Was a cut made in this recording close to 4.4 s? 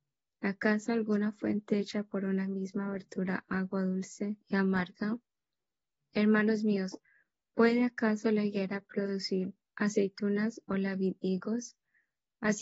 yes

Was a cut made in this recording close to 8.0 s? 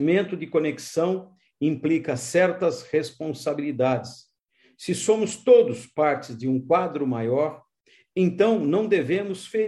no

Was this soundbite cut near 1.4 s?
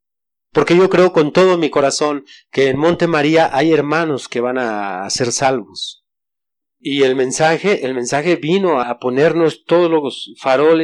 no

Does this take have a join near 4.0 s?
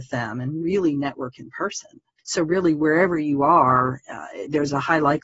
no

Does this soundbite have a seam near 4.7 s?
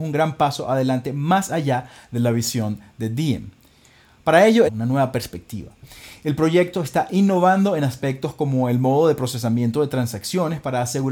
yes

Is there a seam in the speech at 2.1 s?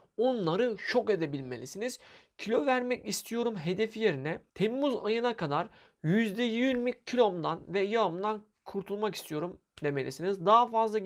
no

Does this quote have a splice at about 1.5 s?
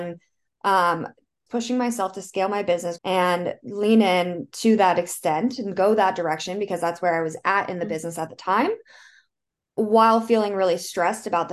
yes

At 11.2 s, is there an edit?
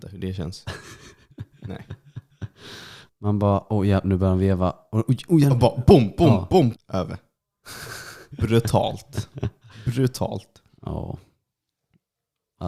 no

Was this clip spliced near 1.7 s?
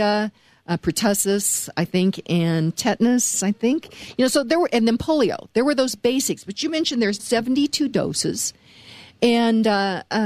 no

